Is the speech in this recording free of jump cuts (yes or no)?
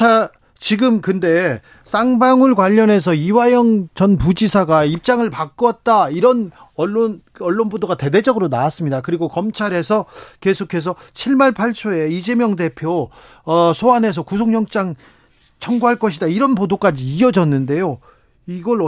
yes